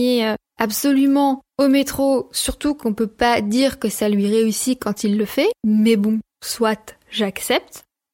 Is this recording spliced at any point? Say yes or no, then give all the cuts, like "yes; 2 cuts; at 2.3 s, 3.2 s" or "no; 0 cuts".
no; 0 cuts